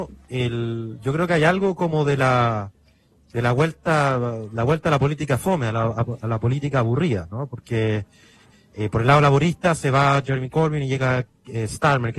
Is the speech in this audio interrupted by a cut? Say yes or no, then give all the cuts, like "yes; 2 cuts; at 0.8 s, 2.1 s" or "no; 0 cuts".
no; 0 cuts